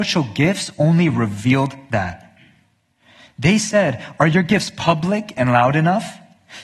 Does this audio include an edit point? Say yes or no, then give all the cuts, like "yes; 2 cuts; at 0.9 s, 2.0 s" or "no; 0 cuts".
no; 0 cuts